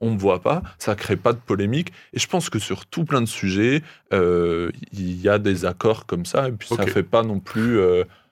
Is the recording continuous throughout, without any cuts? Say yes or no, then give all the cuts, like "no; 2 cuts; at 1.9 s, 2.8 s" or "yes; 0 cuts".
yes; 0 cuts